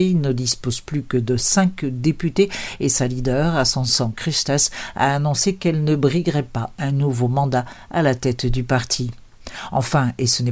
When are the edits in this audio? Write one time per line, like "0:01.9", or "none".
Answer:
none